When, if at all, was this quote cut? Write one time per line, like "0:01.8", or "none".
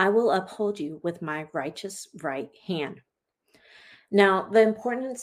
none